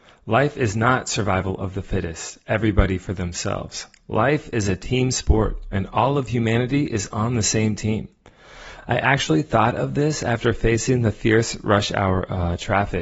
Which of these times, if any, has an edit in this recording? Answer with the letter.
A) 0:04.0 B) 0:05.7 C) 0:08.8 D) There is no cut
D